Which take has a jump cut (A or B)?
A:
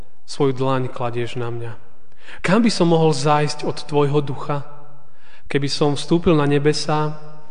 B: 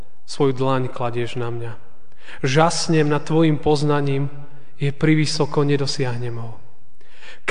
A